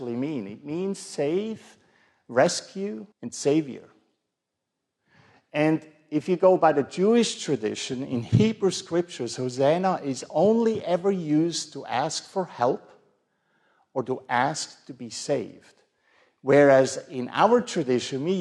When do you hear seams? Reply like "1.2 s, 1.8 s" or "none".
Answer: 3.1 s